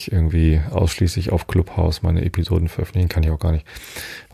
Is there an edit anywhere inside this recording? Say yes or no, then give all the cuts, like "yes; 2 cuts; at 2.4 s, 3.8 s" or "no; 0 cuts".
no; 0 cuts